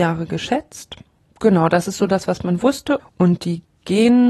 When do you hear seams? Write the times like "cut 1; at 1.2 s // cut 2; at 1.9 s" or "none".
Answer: cut 1; at 3.0 s